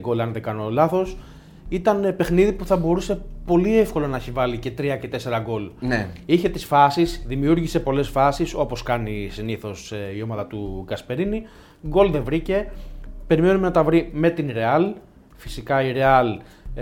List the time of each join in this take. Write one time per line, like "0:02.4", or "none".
none